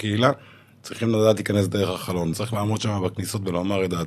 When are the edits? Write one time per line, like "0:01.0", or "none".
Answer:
0:02.3